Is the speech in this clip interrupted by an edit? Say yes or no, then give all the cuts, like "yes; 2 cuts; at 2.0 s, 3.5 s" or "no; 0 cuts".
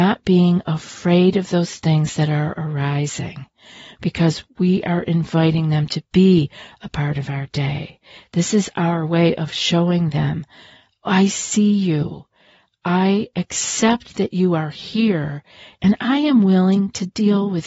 no; 0 cuts